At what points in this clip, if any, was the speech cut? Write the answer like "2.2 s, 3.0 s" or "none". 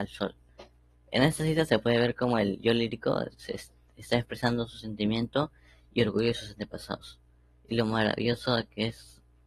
none